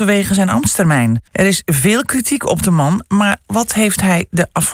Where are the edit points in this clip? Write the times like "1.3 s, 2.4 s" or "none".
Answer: 1.3 s